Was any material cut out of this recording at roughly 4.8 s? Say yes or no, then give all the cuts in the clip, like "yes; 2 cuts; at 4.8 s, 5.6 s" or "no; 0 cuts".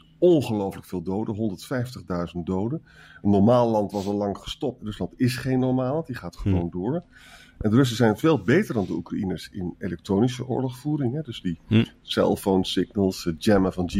yes; 1 cut; at 4.8 s